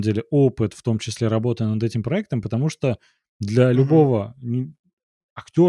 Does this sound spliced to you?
no; 0 cuts

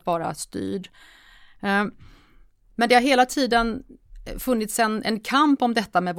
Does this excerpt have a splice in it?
no; 0 cuts

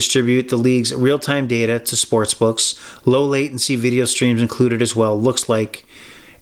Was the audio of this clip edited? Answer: no; 0 cuts

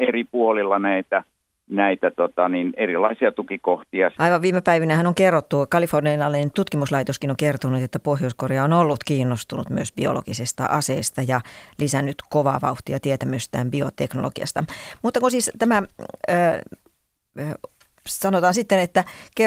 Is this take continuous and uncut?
no; 1 cut; at 4.1 s

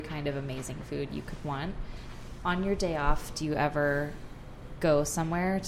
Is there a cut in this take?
no; 0 cuts

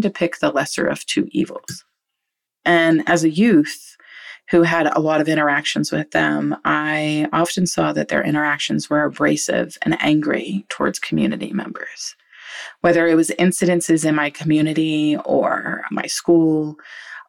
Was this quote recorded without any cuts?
no; 1 cut; at 2.5 s

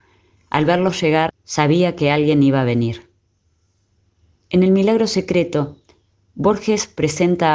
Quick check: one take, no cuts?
no; 1 cut; at 1.3 s

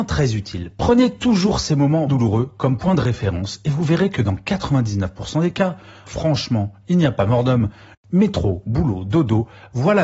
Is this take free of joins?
no; 3 cuts; at 2.1 s, 6.1 s, 7.9 s

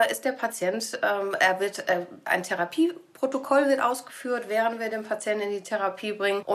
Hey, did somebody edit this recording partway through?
no; 0 cuts

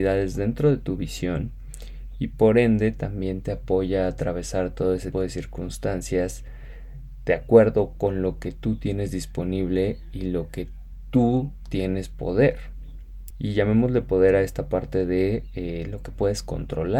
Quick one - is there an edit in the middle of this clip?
yes; 2 cuts; at 5.1 s, 13.3 s

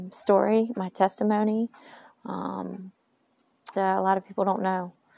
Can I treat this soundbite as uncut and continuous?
no; 1 cut; at 3.7 s

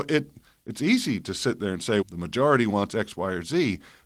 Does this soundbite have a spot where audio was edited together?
yes; 1 cut; at 2.0 s

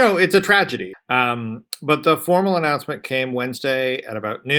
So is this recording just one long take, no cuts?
no; 1 cut; at 0.9 s

